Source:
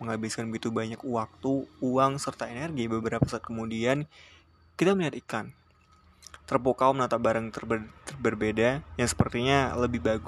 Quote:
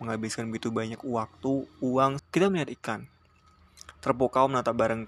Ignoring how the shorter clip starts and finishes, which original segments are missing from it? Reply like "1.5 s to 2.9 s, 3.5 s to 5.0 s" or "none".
2.2 s to 4.6 s